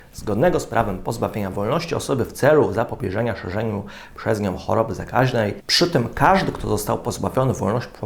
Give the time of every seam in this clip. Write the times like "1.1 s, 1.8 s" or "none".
none